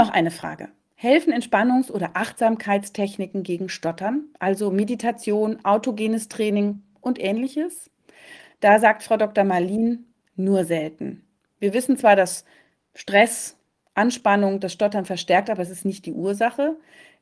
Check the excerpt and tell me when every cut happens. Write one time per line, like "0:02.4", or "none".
none